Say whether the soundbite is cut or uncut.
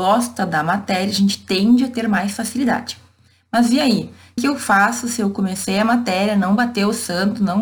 cut